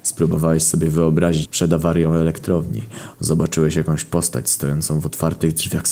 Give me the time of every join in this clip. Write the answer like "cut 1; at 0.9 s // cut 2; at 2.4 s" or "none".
cut 1; at 1.5 s // cut 2; at 3.1 s